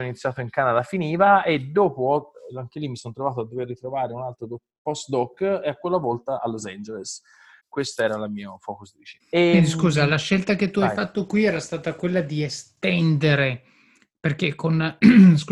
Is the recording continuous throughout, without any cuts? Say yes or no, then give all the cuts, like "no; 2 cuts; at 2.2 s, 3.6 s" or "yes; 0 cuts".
no; 2 cuts; at 7.6 s, 9.2 s